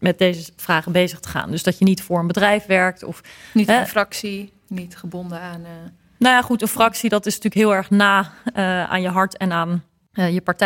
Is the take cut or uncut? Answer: uncut